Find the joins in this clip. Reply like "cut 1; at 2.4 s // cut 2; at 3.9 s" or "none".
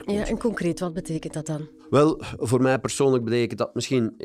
cut 1; at 1.8 s

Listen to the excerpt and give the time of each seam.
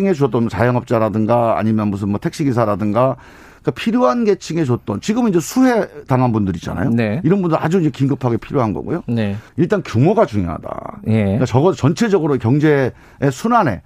cut 1; at 9.5 s

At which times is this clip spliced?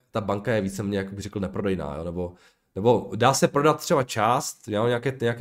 none

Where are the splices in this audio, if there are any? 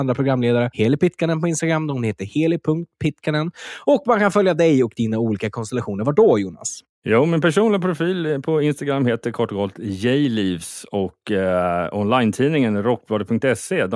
none

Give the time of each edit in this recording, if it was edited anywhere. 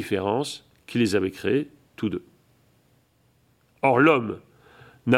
none

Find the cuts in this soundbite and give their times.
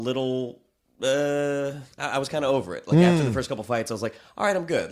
cut 1; at 1.9 s

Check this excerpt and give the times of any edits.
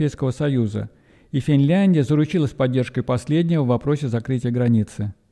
none

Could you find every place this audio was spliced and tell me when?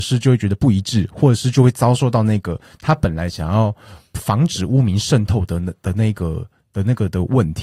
none

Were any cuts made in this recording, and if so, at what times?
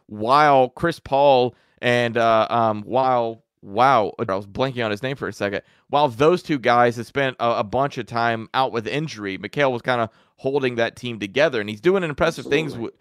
cut 1; at 4.3 s

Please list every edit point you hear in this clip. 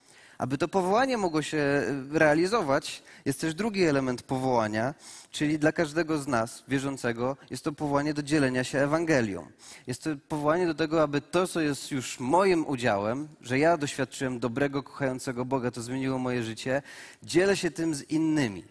none

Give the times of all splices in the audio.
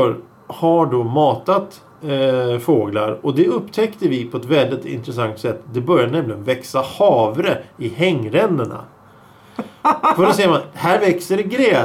none

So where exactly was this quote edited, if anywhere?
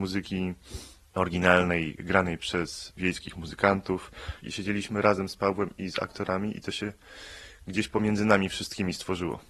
cut 1; at 4.4 s

